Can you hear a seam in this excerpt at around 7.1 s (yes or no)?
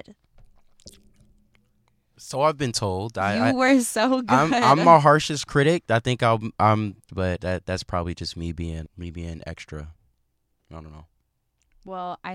yes